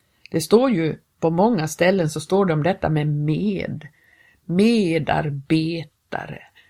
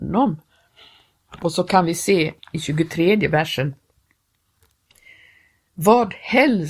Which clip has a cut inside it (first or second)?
first